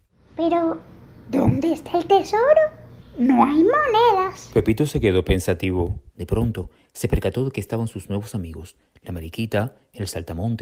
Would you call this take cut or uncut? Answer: cut